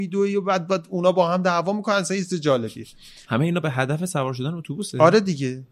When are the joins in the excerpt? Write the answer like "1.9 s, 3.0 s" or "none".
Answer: 3.2 s